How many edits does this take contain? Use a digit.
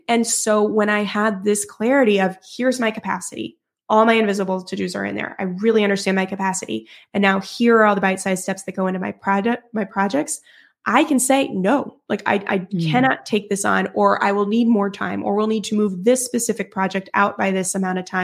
0